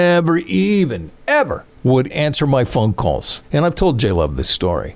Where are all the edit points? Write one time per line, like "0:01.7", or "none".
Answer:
0:02.1
0:03.4